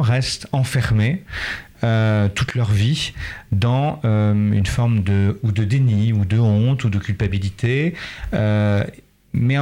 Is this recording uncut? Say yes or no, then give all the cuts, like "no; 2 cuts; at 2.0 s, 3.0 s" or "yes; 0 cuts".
yes; 0 cuts